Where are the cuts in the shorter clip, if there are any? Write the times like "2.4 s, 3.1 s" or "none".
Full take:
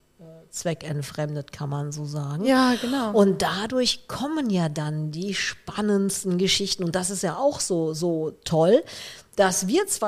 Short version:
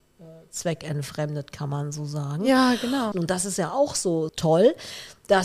3.1 s, 4.3 s